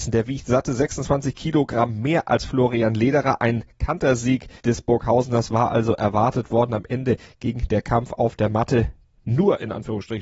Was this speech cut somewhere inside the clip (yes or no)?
yes